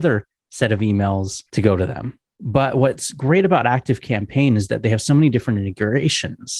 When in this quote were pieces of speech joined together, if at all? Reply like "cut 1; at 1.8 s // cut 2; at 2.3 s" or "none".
none